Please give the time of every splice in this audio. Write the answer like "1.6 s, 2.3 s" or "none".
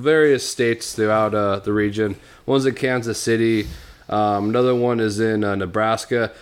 none